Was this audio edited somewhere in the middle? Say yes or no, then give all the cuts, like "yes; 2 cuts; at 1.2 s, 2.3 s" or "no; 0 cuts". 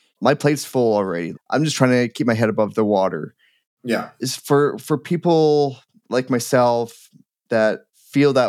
yes; 1 cut; at 1.3 s